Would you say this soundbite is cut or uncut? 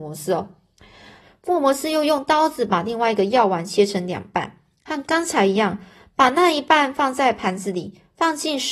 cut